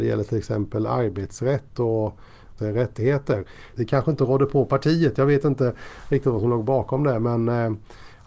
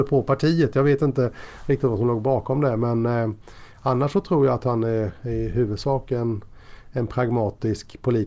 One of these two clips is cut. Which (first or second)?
first